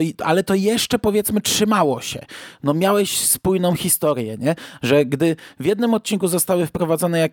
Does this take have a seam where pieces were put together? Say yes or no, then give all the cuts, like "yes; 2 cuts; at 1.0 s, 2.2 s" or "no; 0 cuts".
yes; 1 cut; at 4.8 s